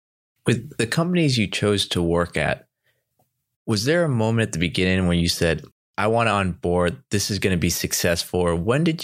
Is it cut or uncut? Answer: uncut